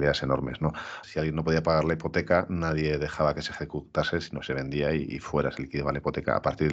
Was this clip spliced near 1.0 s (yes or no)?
yes